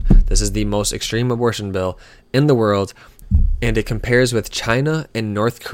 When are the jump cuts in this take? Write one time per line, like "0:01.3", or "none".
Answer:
none